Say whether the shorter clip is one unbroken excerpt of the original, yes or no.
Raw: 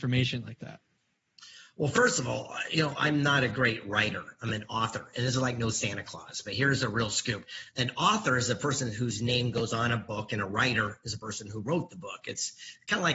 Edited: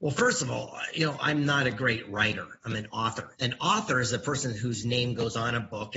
no